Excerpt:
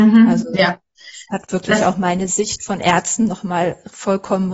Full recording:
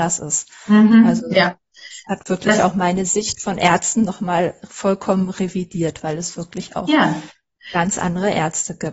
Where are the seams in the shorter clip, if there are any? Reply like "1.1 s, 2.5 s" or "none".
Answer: none